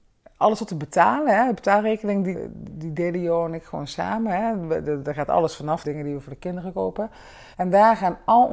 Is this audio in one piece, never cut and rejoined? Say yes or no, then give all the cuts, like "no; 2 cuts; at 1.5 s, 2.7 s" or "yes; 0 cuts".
no; 3 cuts; at 2.3 s, 5.8 s, 7.5 s